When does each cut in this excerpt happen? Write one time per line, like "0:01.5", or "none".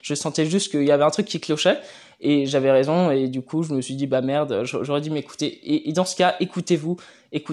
none